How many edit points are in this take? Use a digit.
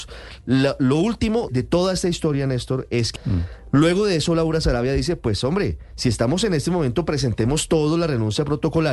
2